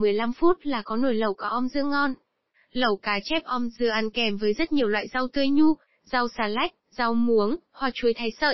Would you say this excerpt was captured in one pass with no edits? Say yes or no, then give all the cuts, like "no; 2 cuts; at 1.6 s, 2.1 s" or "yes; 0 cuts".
yes; 0 cuts